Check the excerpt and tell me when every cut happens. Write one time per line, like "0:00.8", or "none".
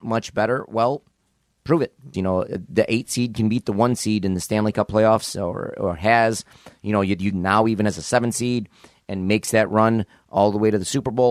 0:02.1
0:07.3